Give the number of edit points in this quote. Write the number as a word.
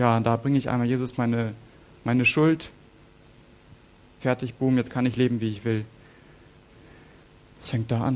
one